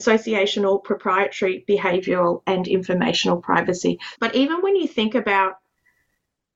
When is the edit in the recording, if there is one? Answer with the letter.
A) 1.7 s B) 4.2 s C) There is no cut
B